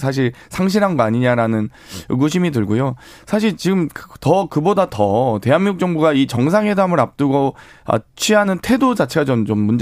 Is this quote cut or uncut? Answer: uncut